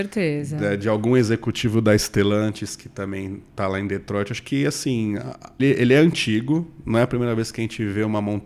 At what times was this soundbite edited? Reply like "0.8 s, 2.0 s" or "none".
5.6 s